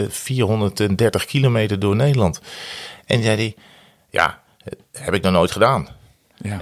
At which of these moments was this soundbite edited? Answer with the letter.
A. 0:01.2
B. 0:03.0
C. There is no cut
C